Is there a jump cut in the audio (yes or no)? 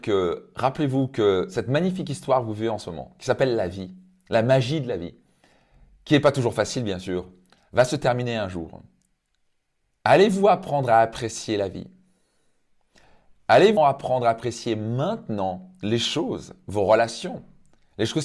yes